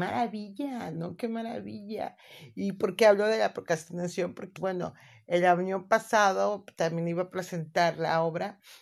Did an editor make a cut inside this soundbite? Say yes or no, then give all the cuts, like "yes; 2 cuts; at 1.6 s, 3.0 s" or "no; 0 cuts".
yes; 1 cut; at 4.6 s